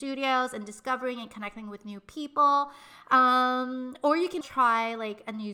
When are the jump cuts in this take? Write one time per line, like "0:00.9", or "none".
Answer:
0:03.0
0:04.4